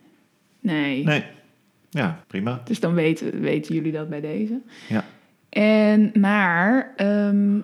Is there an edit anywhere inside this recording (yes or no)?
yes